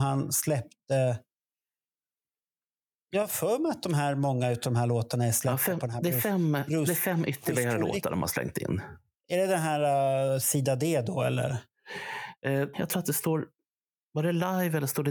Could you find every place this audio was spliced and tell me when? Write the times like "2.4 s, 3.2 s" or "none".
12.7 s